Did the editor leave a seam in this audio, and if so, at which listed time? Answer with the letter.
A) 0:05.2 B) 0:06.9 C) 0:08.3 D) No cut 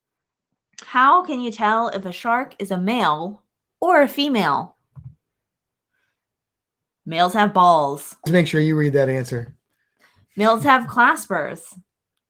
C